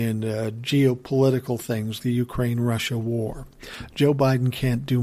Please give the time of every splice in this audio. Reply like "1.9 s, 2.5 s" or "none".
2.0 s